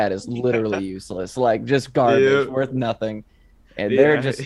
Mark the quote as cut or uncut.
uncut